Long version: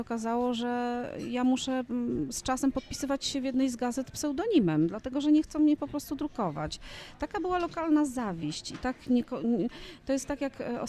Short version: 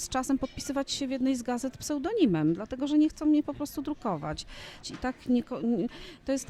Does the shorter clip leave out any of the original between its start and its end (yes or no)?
yes